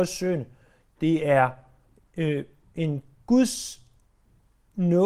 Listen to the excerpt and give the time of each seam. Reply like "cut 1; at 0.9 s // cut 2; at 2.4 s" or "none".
none